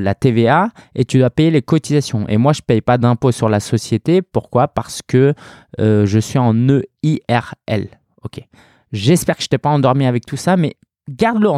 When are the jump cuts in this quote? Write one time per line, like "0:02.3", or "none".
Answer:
none